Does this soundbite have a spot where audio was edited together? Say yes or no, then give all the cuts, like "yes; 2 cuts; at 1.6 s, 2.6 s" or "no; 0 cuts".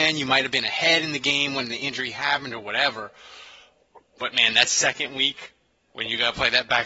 no; 0 cuts